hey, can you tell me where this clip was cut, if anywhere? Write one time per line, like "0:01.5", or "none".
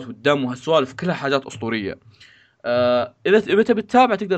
none